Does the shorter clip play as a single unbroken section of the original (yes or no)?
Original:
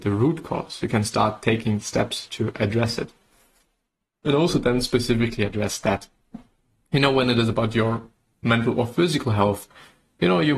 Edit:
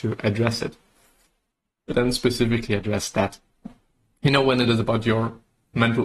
no